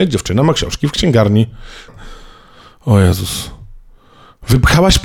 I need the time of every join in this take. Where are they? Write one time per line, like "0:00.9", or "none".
0:01.9